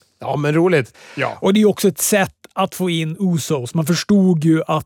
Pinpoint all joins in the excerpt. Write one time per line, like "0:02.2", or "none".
0:00.9

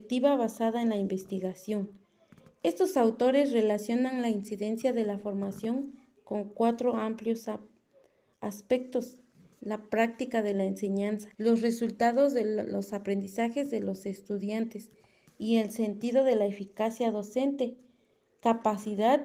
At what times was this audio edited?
0:09.6
0:11.3

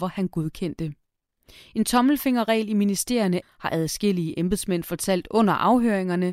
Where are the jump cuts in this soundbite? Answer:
0:03.4

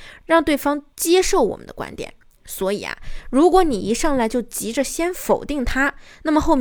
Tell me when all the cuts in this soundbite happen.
none

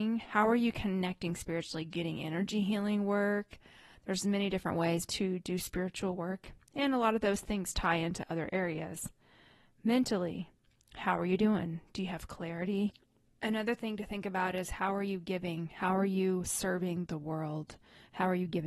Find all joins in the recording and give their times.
0:05.1

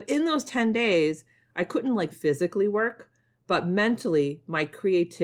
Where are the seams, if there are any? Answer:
0:02.1

